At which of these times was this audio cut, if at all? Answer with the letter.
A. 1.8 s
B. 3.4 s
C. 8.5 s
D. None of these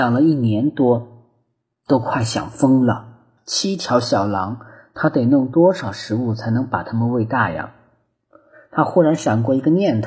B